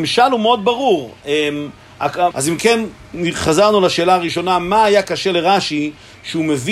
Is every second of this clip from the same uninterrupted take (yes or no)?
no